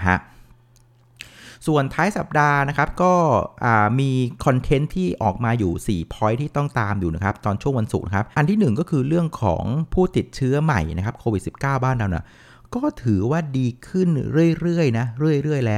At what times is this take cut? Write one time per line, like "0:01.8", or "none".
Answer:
0:08.3

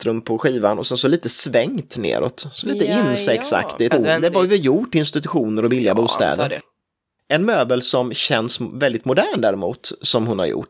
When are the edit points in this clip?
0:03.9

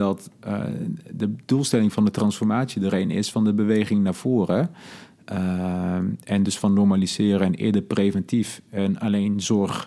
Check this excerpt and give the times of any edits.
none

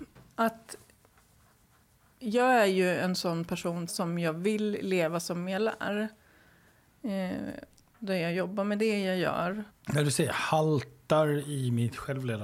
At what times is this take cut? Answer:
0:03.9
0:09.7

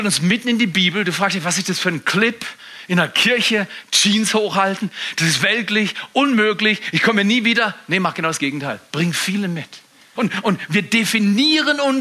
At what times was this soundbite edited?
0:10.2

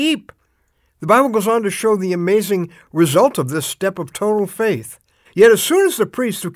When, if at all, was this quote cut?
0:05.3

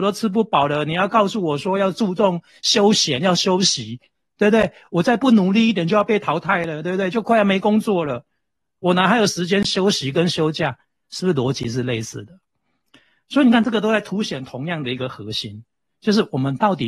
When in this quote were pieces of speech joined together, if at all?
none

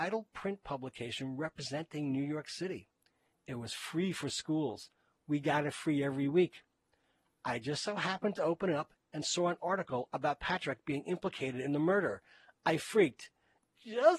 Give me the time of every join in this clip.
0:03.3

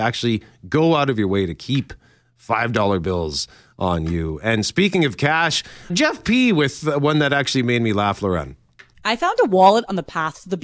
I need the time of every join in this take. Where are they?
0:05.9

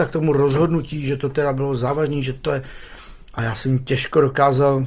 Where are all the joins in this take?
0:03.4

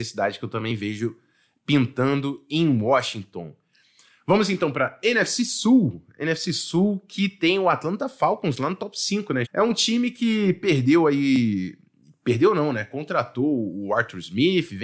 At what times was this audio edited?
0:09.4

